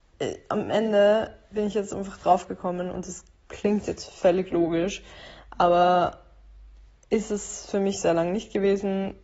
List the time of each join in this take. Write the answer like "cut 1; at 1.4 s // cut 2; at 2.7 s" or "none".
none